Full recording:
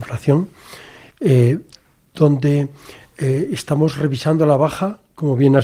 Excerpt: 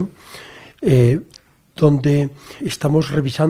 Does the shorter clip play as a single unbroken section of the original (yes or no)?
no